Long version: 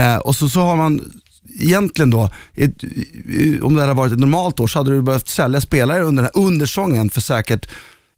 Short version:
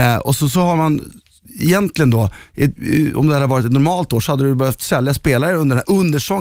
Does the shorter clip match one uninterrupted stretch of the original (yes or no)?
no